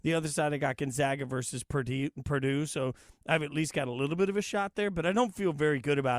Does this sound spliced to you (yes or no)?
no